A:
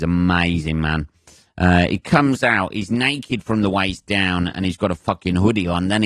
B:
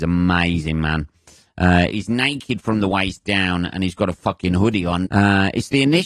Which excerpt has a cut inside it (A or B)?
B